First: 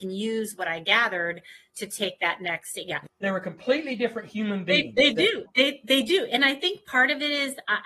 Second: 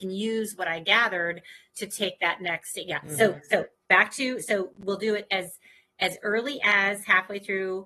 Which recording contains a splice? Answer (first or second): first